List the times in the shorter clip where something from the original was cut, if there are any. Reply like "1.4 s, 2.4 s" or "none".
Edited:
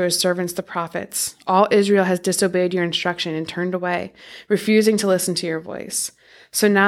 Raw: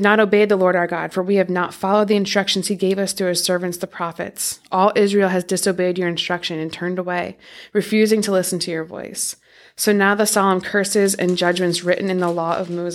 none